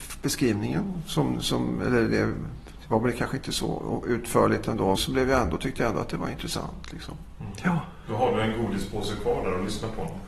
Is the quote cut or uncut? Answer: cut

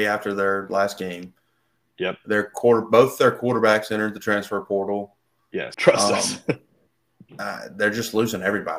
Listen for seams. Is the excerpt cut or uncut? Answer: cut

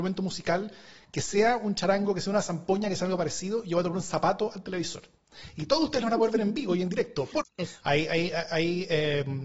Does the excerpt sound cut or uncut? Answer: cut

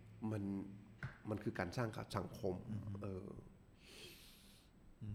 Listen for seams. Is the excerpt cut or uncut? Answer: uncut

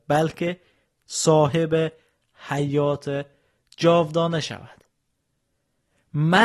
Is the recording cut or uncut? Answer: uncut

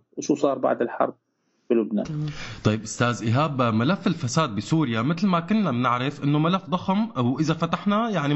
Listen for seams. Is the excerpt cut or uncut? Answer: cut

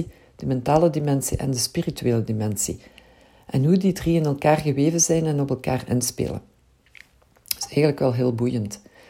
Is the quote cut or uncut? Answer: uncut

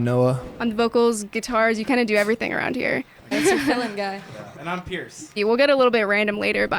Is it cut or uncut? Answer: cut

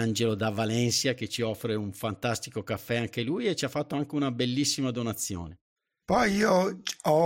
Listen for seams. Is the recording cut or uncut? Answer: cut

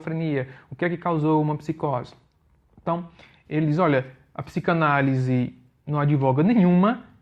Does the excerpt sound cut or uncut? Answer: uncut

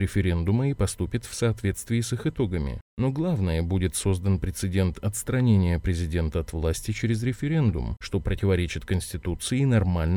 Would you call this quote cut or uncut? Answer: uncut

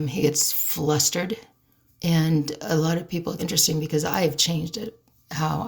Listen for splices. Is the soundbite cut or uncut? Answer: cut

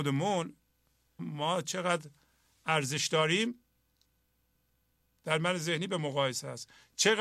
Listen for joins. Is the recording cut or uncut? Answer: cut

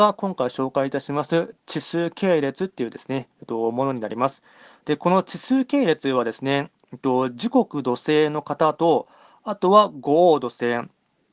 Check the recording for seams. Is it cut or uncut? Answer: uncut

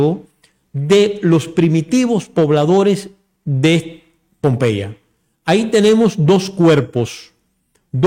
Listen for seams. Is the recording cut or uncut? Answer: uncut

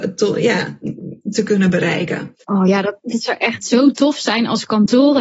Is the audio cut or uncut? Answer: cut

